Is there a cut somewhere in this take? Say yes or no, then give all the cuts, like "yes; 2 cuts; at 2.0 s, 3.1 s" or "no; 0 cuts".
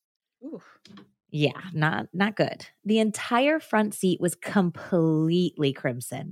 no; 0 cuts